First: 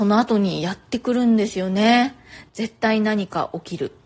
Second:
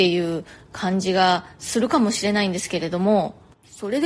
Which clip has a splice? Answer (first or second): first